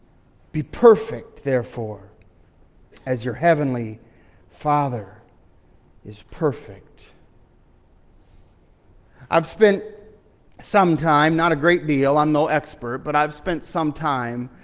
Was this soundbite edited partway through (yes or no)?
no